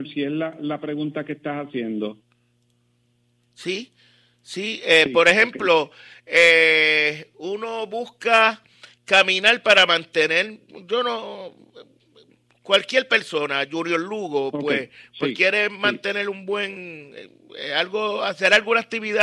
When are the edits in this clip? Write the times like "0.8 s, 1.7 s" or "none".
none